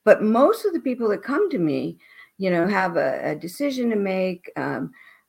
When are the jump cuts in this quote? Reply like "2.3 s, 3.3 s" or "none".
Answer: none